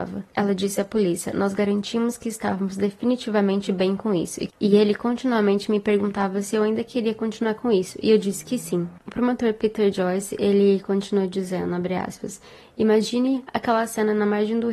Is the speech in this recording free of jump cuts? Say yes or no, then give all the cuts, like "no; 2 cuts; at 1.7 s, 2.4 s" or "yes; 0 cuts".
no; 1 cut; at 9.0 s